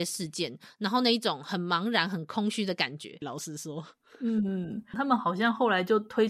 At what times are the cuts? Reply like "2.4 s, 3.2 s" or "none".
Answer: 3.2 s, 4.9 s

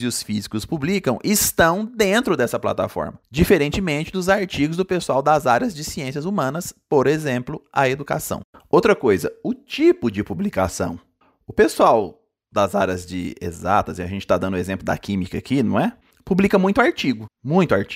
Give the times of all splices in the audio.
none

